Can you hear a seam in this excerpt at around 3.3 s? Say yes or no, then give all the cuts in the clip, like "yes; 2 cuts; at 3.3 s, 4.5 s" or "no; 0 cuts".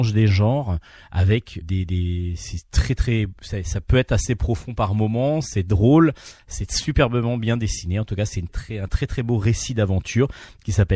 no; 2 cuts; at 1.6 s, 8.5 s